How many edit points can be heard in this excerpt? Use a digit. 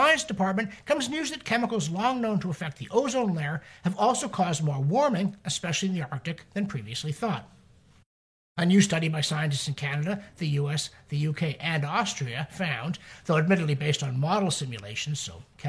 0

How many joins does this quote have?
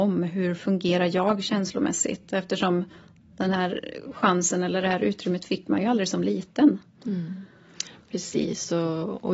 0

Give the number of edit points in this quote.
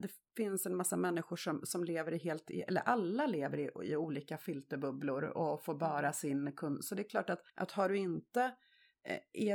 1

